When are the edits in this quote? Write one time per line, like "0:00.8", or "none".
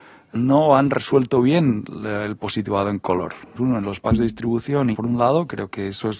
0:03.6
0:04.9